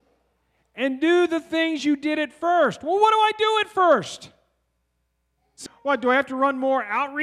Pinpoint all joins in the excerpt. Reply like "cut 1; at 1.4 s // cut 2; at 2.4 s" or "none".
cut 1; at 5.7 s